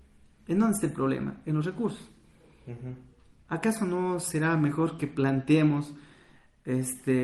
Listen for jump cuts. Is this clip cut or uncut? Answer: uncut